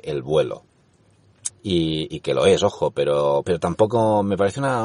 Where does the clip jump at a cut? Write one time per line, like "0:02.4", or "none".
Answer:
0:01.5
0:03.4